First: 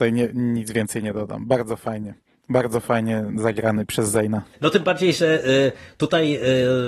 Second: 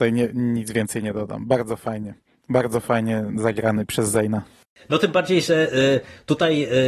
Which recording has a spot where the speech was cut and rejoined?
first; 1 cut; at 4.5 s

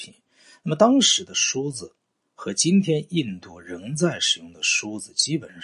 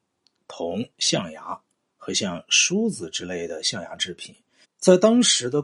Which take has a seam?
second; 1 cut; at 4.6 s

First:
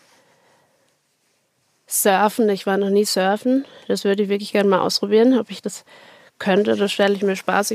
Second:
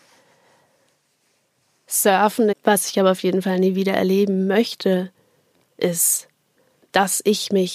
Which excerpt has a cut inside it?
second; 1 cut; at 2.5 s

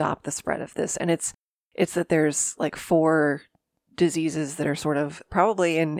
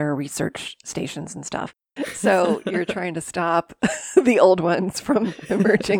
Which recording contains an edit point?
second; 1 cut; at 2.0 s

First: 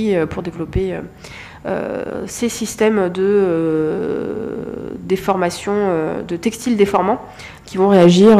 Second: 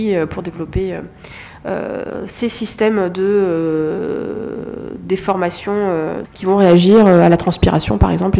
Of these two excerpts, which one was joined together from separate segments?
second; 1 cut; at 6.2 s

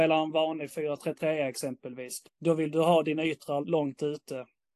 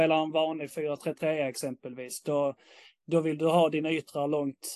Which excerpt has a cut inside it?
first; 2 cuts; at 2.2 s, 3.6 s

